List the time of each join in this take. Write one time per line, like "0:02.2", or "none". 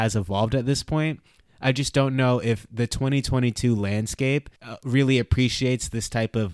0:04.6